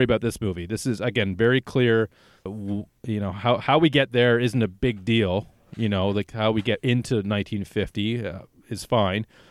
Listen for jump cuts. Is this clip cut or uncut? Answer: cut